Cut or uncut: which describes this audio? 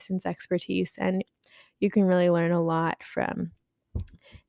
uncut